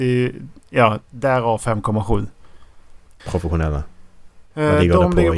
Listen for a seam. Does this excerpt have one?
yes; 1 cut; at 3.2 s

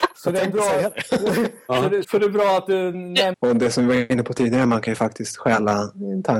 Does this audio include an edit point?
yes; 2 cuts; at 2.0 s, 3.3 s

